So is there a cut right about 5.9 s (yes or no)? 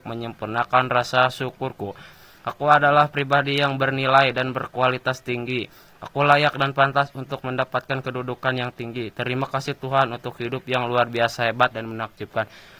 no